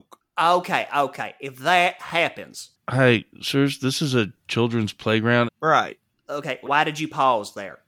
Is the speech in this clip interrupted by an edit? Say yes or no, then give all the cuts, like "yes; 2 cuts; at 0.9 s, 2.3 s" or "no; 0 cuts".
yes; 3 cuts; at 2.8 s, 5.5 s, 6.7 s